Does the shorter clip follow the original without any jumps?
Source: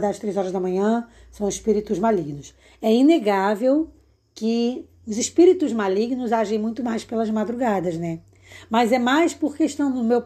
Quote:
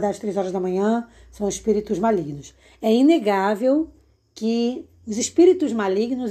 yes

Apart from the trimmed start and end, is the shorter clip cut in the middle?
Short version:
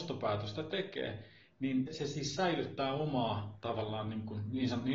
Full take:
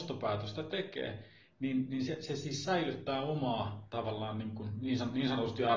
yes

